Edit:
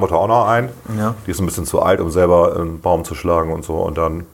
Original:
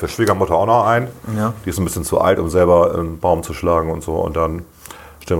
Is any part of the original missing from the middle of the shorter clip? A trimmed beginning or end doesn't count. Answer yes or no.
no